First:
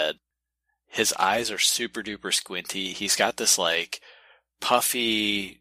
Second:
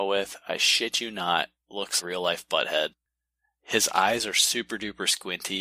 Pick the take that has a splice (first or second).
second